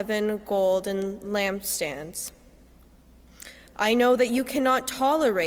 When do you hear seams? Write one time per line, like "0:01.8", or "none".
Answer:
0:03.7